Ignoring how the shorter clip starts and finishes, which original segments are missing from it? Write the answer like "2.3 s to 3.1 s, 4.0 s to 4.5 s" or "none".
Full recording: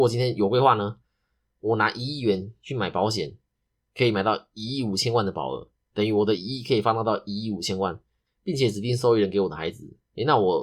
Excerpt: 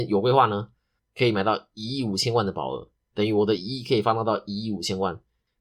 1.3 s to 3.8 s